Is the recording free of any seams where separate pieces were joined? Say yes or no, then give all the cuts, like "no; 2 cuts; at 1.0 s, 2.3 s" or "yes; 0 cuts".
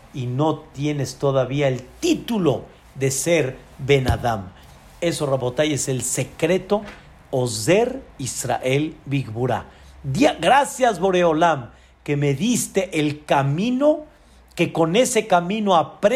yes; 0 cuts